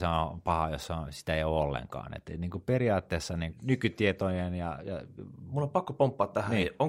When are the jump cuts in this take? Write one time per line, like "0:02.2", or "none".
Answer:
none